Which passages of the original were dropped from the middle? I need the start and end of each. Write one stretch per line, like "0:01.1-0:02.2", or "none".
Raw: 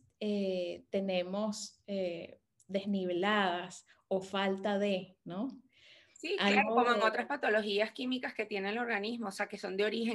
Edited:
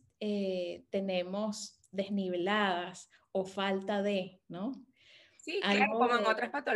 0:01.8-0:02.6